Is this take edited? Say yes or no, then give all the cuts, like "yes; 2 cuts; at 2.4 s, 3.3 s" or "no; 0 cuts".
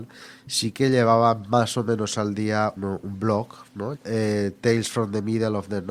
yes; 2 cuts; at 2.8 s, 3.9 s